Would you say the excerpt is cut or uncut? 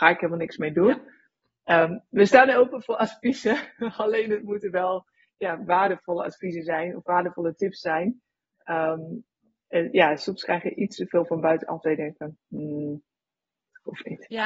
uncut